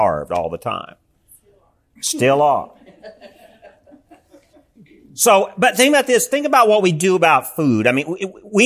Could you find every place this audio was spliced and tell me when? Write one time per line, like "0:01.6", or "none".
none